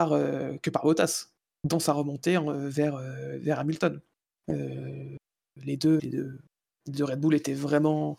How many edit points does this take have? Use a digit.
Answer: 2